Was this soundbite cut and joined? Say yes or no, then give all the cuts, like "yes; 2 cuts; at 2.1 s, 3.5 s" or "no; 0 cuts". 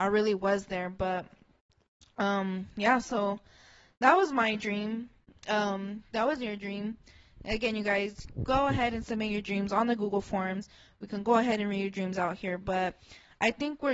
no; 0 cuts